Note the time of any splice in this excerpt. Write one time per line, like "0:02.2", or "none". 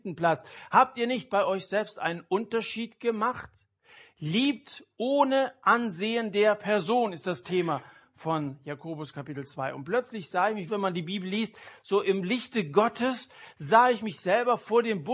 0:10.7